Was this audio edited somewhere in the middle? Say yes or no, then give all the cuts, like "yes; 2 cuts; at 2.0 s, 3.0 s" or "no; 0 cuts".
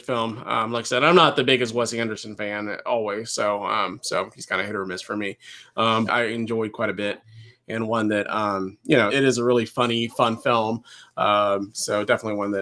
yes; 2 cuts; at 6.1 s, 9.1 s